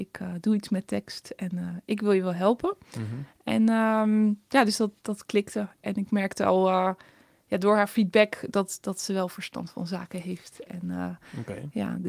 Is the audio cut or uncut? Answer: uncut